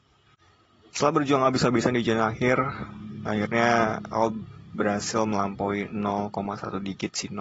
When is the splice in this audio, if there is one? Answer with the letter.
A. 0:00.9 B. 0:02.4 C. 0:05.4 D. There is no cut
A